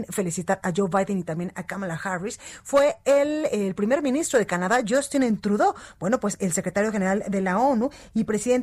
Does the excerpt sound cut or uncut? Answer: uncut